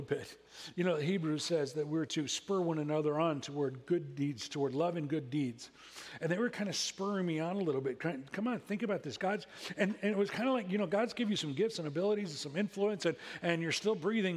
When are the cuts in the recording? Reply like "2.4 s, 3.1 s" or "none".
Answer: none